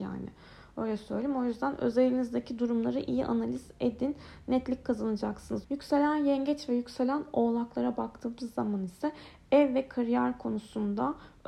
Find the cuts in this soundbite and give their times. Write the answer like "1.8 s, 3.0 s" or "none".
5.6 s